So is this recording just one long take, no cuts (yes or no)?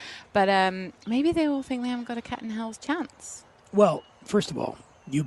yes